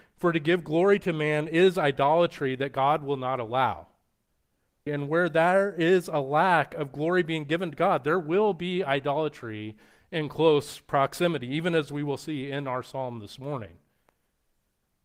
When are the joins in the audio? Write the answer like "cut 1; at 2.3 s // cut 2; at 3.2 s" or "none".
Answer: cut 1; at 4.9 s